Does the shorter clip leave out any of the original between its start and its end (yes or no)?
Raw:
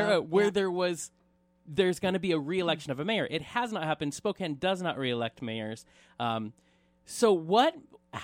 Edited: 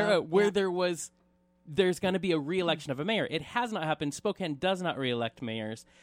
no